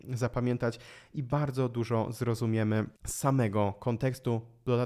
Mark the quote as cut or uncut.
cut